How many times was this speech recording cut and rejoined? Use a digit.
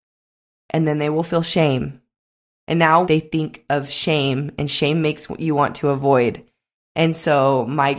1